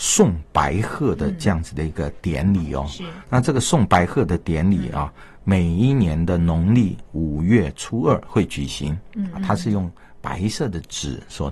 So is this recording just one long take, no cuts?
no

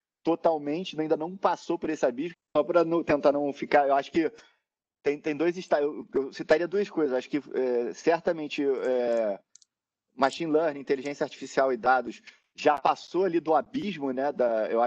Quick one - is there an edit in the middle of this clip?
yes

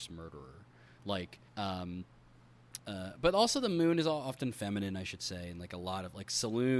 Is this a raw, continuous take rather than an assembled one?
no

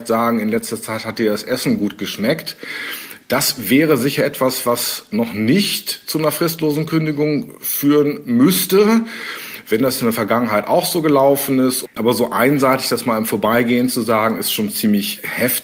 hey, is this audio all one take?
no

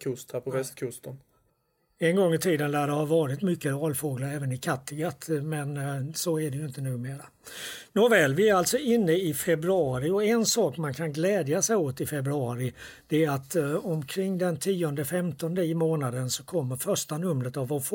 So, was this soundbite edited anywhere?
no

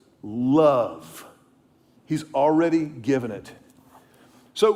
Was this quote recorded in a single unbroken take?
no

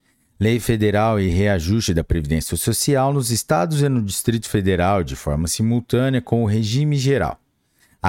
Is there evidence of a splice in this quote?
no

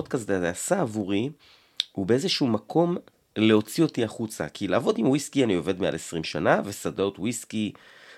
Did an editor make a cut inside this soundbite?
no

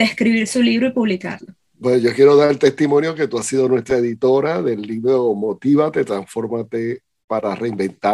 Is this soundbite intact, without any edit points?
yes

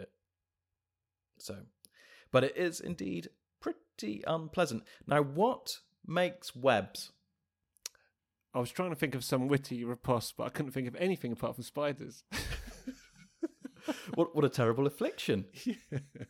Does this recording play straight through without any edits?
yes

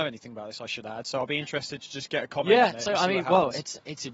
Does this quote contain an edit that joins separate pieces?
no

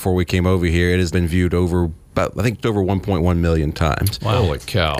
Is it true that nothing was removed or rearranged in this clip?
no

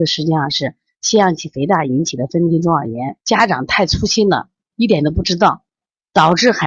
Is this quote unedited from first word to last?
no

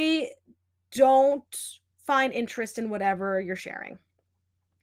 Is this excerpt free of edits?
yes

